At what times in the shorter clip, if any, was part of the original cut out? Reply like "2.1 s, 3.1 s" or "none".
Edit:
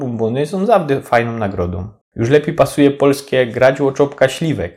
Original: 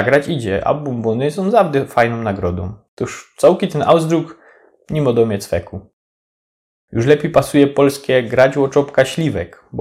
2.0 s

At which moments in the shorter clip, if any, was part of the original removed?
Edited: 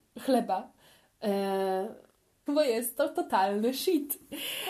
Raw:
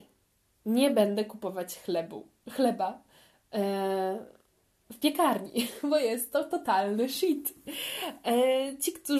2.5 s

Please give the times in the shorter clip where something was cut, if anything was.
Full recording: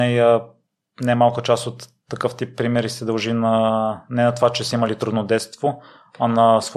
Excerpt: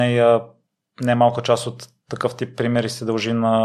none

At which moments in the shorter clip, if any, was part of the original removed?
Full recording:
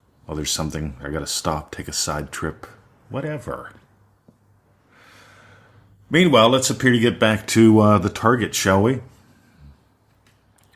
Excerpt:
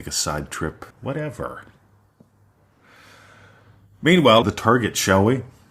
0.9 s, 4.4 s

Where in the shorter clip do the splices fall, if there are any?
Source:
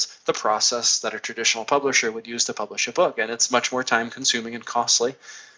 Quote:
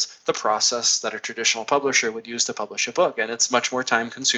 none

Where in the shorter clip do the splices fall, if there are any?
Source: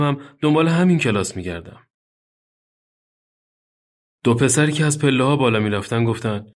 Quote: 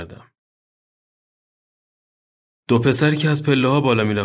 none

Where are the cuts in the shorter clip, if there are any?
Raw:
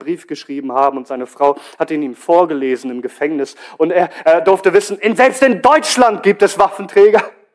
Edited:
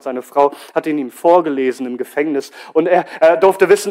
none

